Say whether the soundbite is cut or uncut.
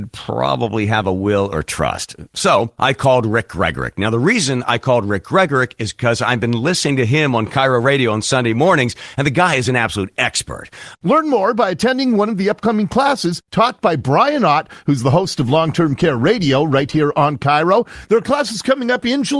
cut